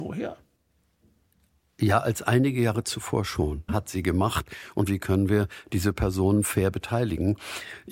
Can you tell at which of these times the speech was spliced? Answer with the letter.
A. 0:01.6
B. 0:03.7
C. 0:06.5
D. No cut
B